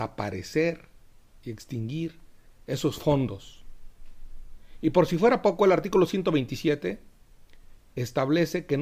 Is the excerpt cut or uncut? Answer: uncut